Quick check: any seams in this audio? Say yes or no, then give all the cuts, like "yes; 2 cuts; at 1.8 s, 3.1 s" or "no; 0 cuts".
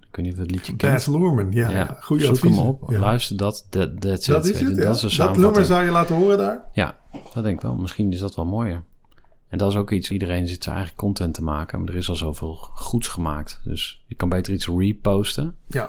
no; 0 cuts